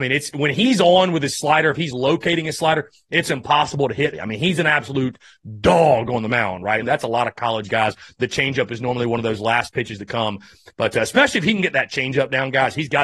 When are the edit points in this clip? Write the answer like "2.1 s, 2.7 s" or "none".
4.1 s, 6.8 s